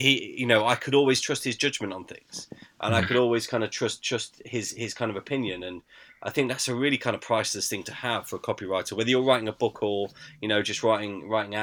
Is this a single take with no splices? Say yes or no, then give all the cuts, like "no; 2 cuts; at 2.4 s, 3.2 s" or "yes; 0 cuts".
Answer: yes; 0 cuts